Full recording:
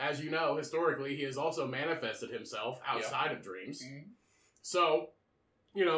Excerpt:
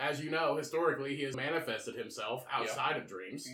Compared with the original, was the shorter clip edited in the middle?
yes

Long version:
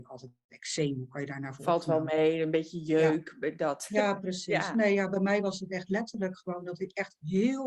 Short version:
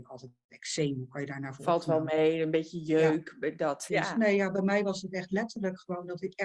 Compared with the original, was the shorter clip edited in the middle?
yes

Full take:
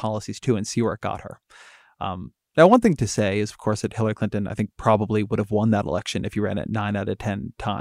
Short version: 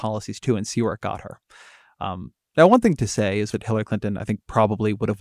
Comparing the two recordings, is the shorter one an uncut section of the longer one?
no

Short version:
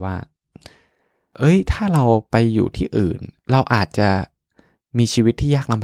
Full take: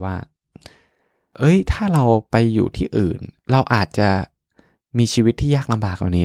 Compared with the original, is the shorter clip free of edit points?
yes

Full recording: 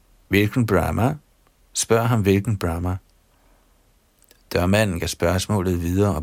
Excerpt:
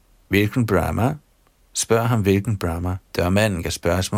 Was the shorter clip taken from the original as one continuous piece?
no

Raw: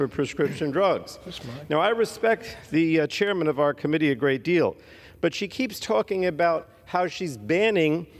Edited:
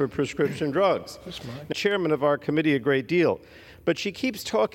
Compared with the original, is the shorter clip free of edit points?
no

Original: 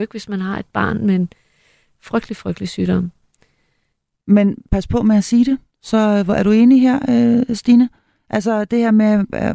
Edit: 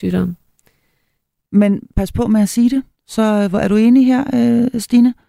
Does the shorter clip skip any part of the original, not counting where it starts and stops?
no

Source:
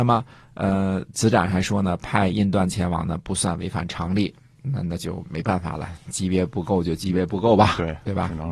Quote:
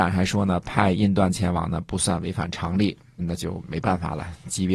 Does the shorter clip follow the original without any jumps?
no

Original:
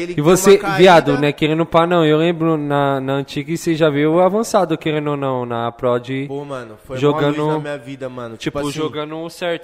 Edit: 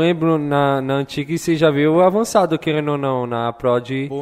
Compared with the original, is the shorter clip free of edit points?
yes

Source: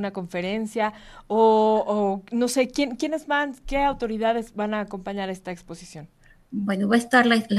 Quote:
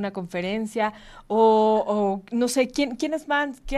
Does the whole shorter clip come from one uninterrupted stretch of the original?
yes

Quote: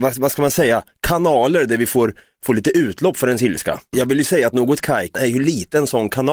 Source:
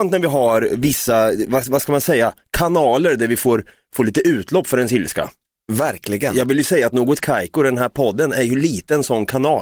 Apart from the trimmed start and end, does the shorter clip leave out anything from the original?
yes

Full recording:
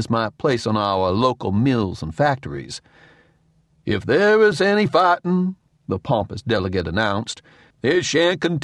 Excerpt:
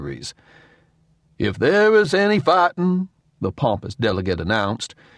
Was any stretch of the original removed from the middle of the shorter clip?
no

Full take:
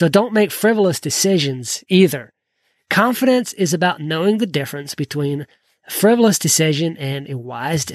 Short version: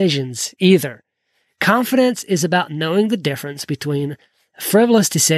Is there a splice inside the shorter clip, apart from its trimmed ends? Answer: no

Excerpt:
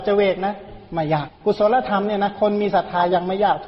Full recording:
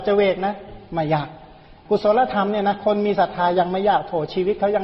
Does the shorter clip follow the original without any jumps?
no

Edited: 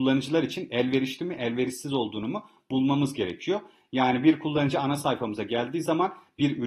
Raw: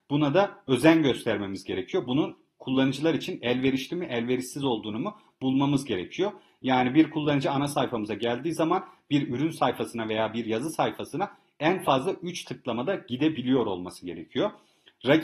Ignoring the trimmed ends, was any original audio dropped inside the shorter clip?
no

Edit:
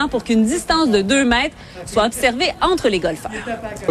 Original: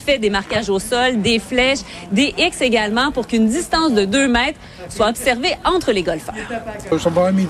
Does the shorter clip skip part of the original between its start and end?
no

